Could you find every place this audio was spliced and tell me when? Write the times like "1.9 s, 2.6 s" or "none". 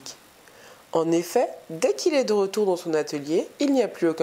none